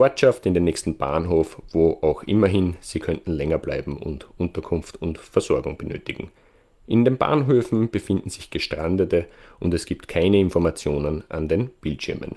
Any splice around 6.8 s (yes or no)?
no